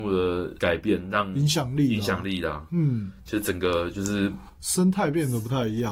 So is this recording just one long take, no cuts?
yes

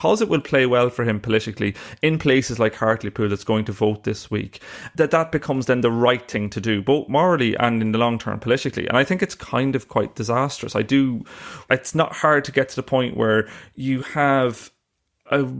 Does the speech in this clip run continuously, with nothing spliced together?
yes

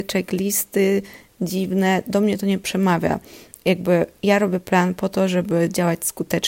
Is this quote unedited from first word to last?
yes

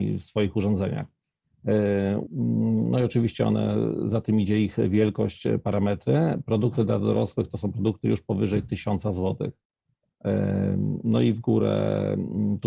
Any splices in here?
yes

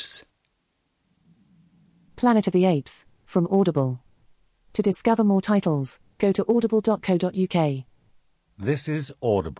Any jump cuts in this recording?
no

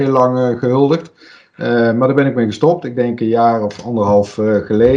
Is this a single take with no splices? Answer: yes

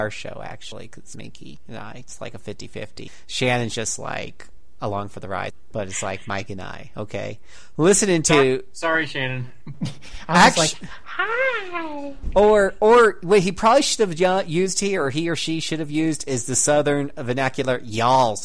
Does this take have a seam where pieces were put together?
yes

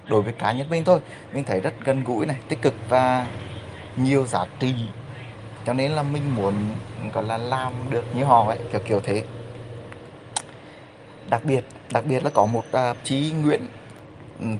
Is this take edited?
yes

